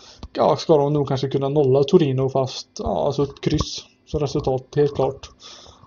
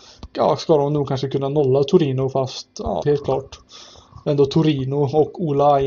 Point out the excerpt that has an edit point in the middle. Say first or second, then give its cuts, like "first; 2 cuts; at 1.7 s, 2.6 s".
second; 2 cuts; at 3.0 s, 4.2 s